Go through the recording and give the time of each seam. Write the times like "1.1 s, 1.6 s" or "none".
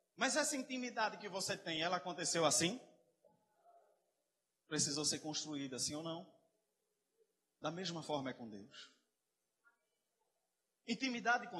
none